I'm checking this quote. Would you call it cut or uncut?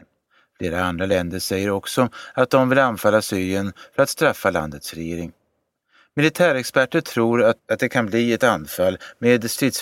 cut